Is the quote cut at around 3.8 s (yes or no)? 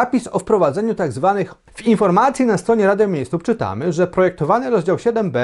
no